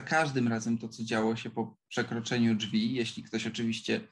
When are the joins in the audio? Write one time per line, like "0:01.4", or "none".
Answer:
none